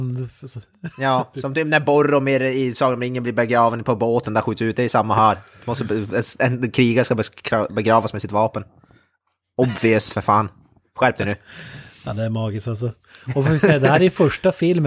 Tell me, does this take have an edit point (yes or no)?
no